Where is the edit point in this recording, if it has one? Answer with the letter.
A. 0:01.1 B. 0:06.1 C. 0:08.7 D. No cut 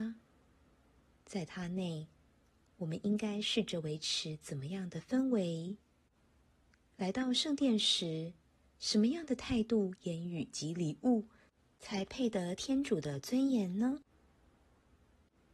A